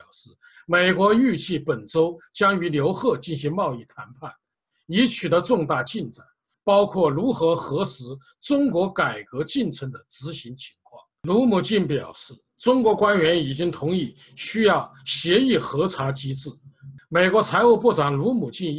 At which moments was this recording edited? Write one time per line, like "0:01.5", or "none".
0:06.5
0:17.0